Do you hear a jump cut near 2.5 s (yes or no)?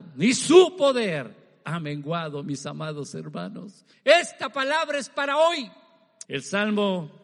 no